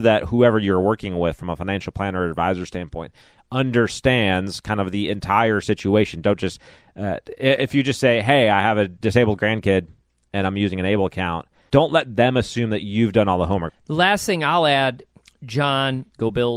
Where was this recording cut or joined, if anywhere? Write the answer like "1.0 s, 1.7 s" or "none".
11.7 s, 13.7 s